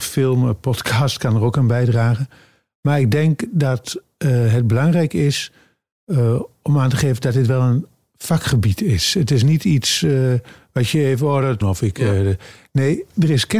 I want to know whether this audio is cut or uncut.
cut